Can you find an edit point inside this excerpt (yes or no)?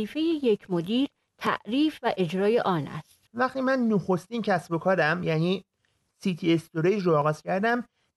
yes